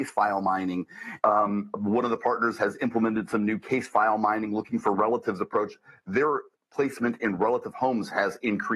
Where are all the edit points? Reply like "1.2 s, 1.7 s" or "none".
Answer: 1.2 s

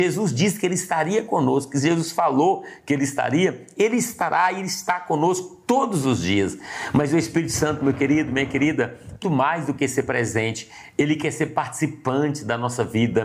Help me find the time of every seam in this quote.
9.2 s

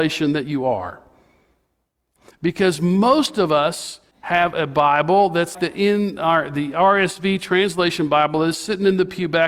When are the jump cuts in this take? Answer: 4.1 s, 5.5 s

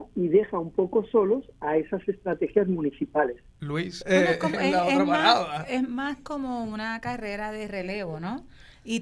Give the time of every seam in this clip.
4.0 s

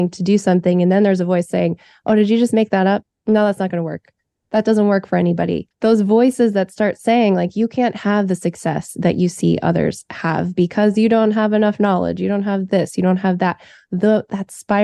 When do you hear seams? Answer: 5.7 s

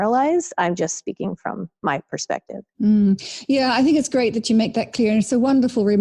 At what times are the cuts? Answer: none

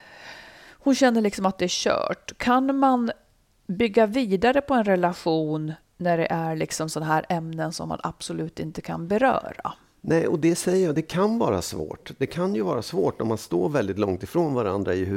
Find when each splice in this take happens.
none

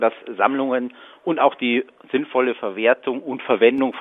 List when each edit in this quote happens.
none

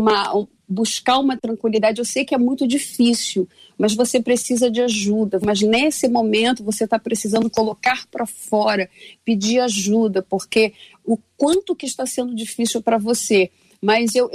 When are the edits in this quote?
5.4 s

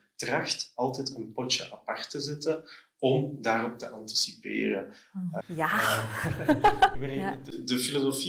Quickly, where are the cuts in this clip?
5.4 s, 6.9 s

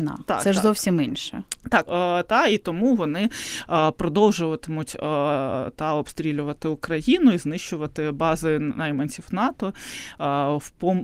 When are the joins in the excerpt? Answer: 1.9 s

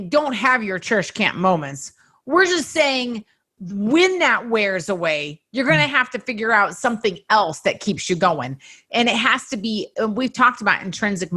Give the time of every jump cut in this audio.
none

